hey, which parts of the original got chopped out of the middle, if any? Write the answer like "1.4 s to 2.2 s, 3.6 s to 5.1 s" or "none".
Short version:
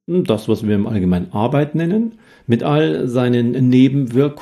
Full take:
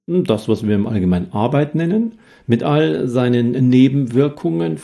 none

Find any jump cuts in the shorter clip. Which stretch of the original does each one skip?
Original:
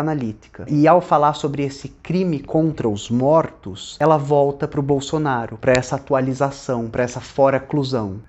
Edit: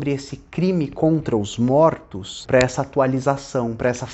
4.0 s to 5.6 s

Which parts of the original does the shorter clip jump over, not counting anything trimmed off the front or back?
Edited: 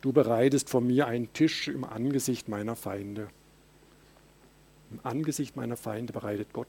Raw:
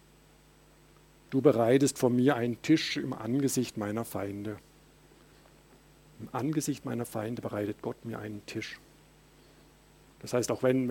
none

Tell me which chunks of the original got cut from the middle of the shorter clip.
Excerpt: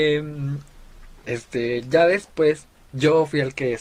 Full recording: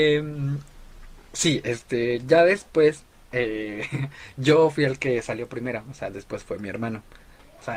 1.2 s to 1.6 s, 3.3 s to 4.3 s

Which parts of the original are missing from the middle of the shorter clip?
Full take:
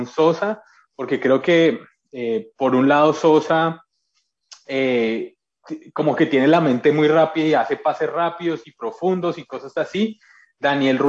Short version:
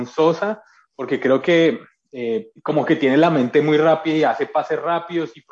2.6 s to 5.9 s

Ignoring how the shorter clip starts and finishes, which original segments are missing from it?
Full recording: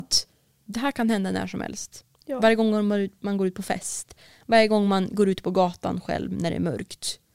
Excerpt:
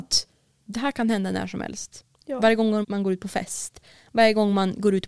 2.8 s to 3.2 s

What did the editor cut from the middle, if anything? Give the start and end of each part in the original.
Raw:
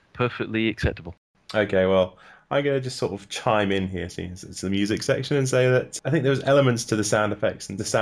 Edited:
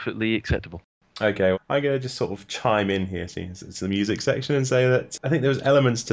1.9 s to 2.3 s

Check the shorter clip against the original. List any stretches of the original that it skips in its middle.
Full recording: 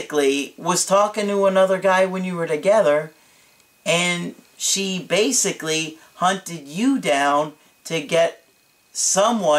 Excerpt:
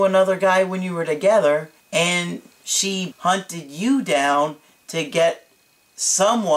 3.2 s to 3.7 s, 5.0 s to 6.1 s

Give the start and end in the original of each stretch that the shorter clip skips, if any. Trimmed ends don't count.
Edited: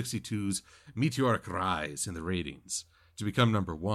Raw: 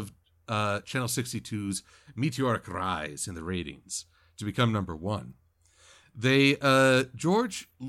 none

